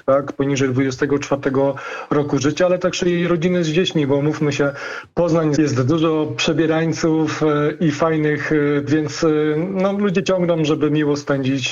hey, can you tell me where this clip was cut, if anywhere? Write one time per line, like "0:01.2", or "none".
0:05.6
0:08.9